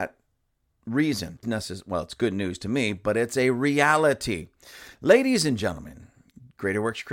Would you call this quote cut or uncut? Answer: cut